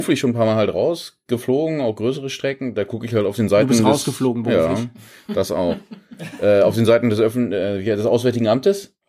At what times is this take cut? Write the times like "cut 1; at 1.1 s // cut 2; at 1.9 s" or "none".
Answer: none